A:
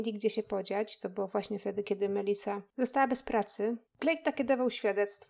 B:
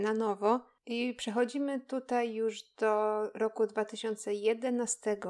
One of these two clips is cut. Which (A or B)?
A